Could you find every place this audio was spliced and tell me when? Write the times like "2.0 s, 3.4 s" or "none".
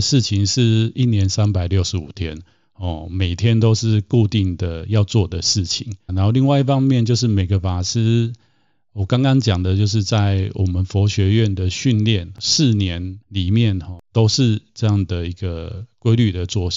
6.1 s